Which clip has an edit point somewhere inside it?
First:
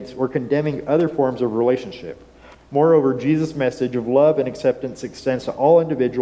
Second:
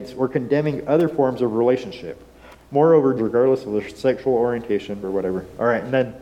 second; 2 cuts; at 3.2 s, 5.0 s

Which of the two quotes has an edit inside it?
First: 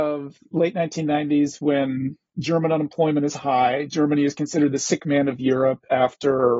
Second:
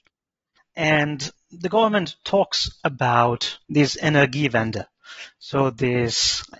second; 1 cut; at 3.6 s

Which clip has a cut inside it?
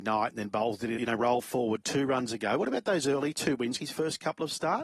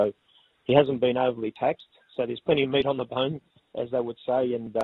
first; 2 cuts; at 1.0 s, 3.8 s

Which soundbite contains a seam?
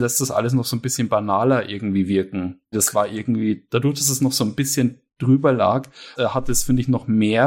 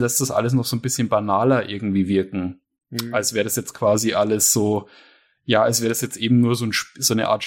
first; 2 cuts; at 2.7 s, 6.1 s

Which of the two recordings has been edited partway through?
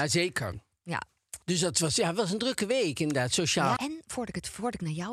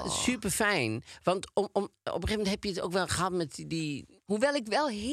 first; 2 cuts; at 1.4 s, 3.8 s

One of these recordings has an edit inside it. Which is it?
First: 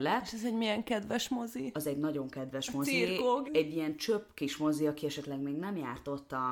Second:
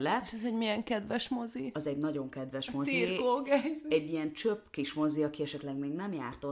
first; 1 cut; at 3.5 s

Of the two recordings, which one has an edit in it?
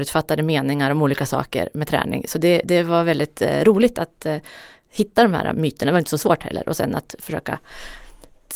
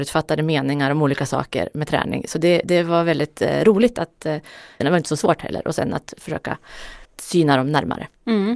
second; 2 cuts; at 4.8 s, 7.1 s

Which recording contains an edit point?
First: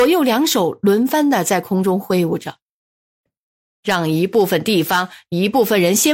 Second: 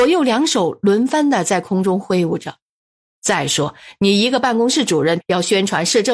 second; 2 cuts; at 3.2 s, 5.2 s

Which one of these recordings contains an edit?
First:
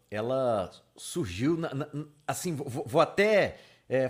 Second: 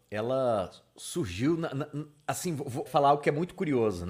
second; 1 cut; at 2.9 s

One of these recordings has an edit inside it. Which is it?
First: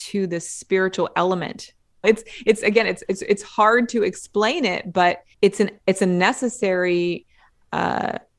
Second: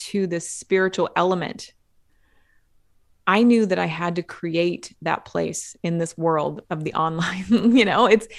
first; 2 cuts; at 2.0 s, 5.3 s

